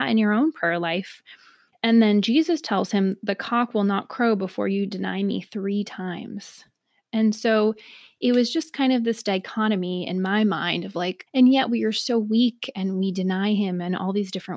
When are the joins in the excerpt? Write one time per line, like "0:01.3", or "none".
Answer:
0:01.7
0:11.3